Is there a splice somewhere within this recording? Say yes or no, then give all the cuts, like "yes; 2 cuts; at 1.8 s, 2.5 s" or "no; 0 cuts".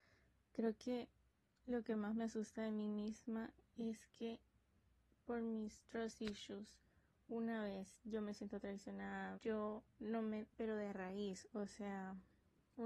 yes; 2 cuts; at 9.3 s, 10.5 s